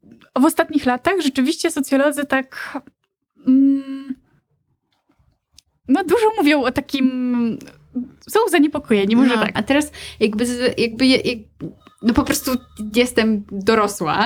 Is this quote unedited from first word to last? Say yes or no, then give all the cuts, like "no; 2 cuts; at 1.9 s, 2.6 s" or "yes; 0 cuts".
no; 1 cut; at 9.6 s